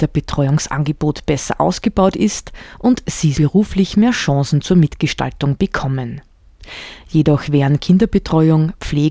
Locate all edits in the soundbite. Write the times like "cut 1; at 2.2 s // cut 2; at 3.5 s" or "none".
cut 1; at 3.3 s